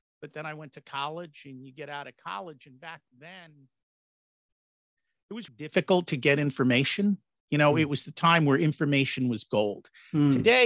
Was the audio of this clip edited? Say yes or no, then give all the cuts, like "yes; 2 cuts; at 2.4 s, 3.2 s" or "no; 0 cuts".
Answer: yes; 1 cut; at 5.5 s